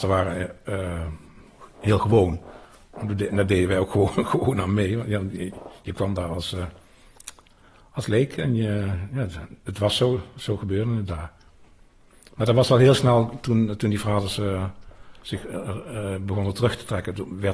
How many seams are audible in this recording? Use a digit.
0